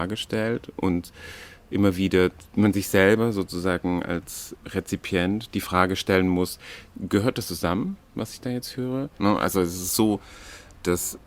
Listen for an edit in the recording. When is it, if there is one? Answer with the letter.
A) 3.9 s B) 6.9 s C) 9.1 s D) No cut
C